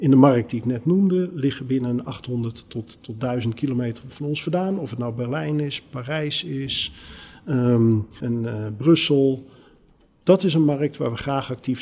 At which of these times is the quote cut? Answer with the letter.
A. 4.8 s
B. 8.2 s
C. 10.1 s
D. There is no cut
B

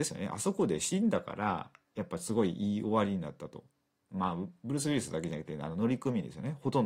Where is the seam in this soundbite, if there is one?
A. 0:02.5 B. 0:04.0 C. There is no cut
C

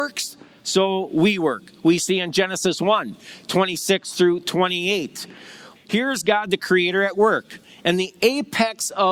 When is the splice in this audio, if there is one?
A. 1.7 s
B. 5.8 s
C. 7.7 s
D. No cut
B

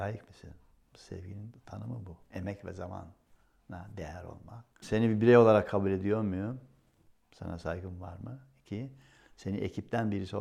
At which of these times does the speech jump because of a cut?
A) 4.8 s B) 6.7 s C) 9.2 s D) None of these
A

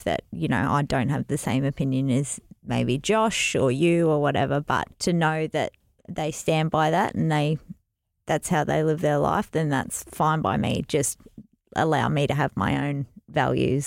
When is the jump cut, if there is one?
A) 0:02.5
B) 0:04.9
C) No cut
B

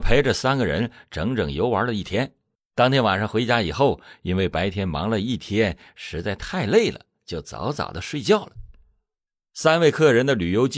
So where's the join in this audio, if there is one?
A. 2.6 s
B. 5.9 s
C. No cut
A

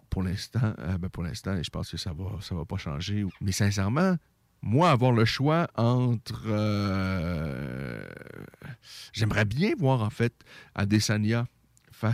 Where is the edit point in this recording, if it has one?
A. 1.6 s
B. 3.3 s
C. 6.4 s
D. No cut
B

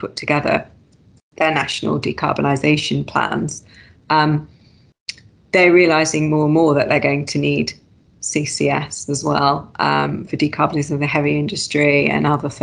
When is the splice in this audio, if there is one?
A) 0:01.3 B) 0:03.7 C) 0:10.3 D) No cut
C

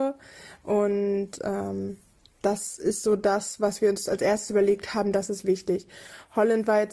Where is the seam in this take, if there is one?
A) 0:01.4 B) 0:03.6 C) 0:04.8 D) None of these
D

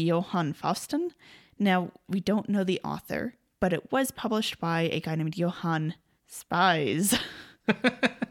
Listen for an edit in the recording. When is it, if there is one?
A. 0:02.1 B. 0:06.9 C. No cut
A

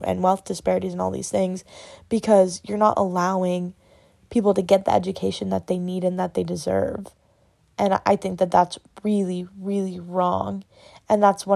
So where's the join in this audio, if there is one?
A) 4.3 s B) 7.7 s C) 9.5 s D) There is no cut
D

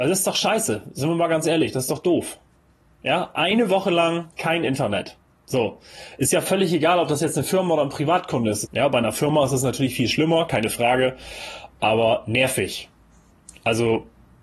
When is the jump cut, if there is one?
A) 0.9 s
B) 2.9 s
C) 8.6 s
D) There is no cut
C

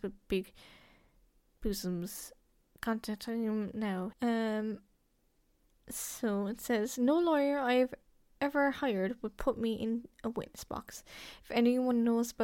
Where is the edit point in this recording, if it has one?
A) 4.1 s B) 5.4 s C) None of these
A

